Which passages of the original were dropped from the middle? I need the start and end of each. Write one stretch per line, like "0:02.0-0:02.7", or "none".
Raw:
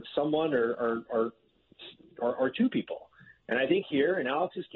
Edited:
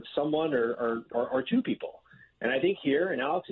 0:01.1-0:02.1